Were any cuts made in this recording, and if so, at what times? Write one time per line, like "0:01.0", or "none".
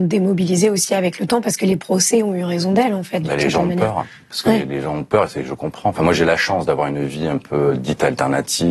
none